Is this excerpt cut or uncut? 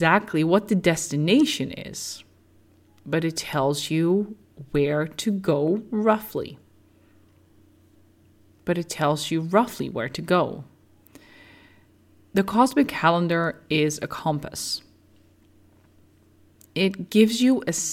cut